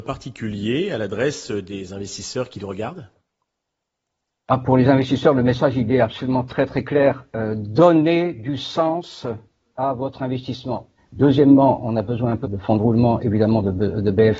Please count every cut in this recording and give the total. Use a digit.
2